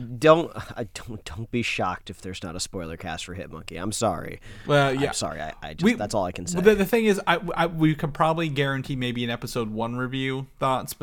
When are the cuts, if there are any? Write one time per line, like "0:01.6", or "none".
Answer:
none

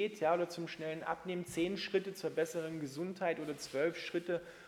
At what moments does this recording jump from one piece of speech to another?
none

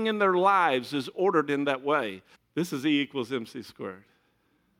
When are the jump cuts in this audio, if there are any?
0:02.3

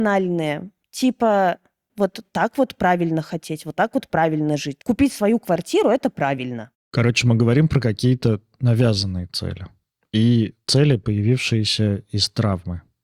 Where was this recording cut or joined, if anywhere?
none

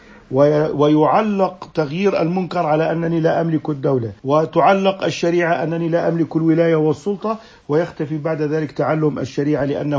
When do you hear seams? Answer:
0:04.2

